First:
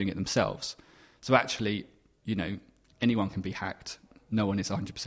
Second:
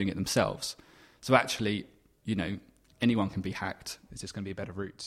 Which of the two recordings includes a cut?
second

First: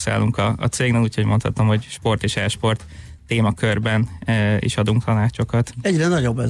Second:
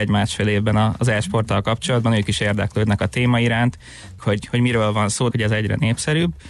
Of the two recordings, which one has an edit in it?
second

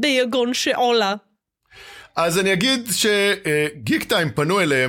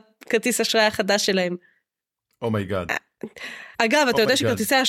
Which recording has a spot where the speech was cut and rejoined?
second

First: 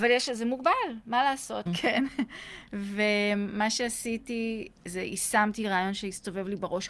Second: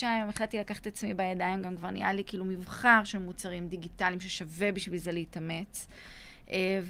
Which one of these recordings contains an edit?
first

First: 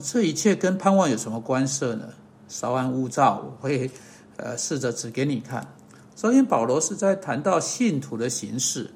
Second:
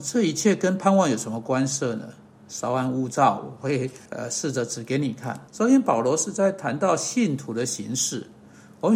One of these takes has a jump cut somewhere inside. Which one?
second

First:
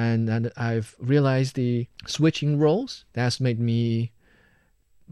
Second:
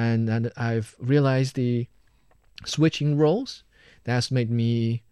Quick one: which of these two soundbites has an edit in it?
first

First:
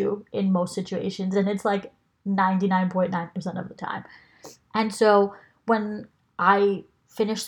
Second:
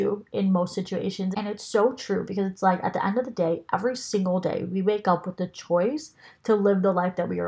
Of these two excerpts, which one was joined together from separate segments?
second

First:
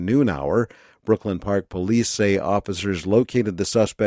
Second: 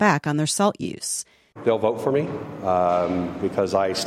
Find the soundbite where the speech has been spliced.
second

